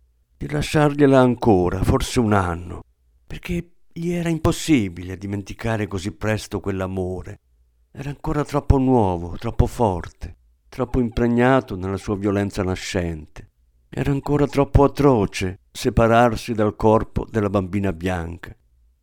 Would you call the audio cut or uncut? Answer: uncut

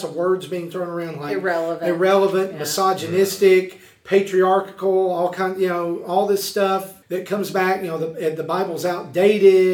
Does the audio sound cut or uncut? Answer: cut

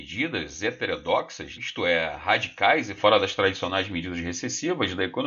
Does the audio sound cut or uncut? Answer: cut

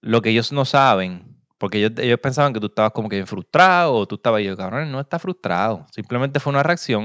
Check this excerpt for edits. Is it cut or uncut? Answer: uncut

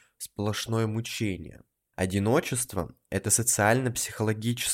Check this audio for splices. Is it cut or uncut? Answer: cut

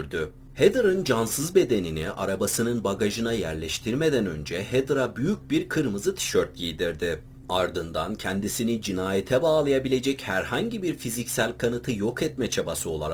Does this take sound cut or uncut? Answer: uncut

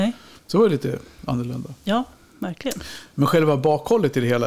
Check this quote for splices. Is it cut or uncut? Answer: uncut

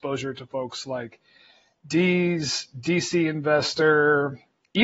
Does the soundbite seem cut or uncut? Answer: uncut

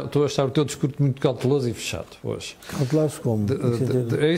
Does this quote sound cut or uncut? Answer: uncut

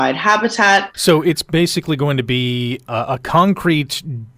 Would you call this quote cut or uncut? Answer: cut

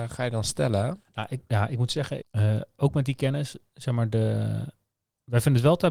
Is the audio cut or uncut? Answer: cut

